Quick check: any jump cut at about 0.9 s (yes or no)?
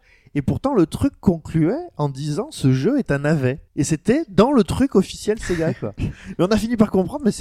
no